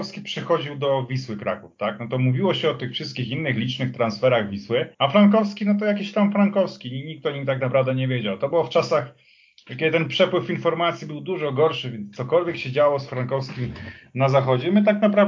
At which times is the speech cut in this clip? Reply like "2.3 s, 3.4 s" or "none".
4.9 s